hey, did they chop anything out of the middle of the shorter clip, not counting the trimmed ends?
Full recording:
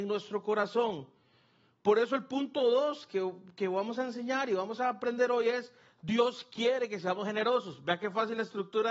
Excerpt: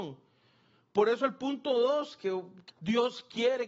yes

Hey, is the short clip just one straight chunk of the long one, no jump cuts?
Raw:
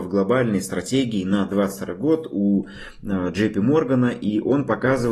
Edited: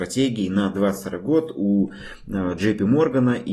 yes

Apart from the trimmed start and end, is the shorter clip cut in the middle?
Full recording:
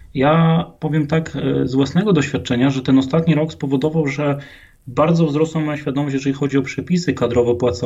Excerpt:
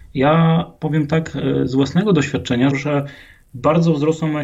yes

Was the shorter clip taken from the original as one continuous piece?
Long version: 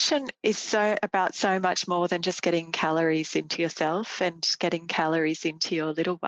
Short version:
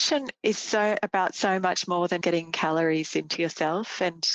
no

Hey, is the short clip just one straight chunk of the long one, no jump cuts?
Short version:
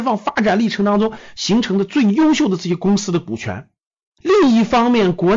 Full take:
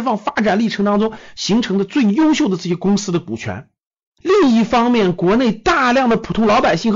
yes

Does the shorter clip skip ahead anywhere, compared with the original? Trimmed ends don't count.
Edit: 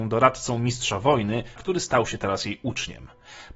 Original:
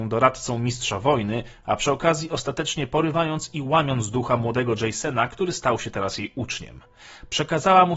yes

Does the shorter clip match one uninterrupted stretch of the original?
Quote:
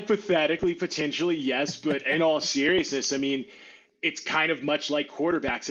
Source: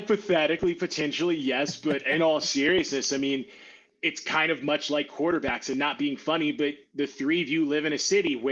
yes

